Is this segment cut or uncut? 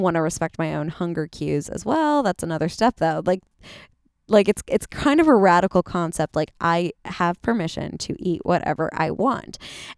uncut